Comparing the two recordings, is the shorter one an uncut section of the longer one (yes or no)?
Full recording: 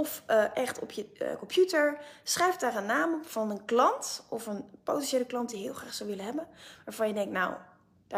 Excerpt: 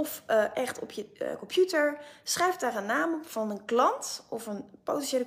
yes